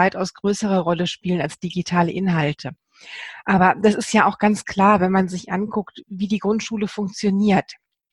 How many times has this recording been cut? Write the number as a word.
zero